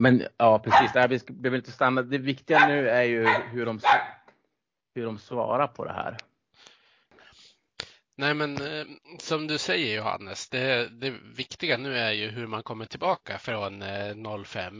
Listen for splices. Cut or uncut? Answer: uncut